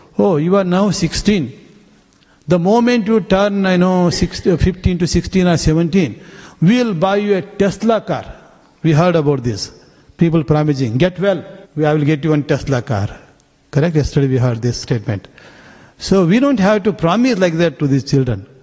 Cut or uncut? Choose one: cut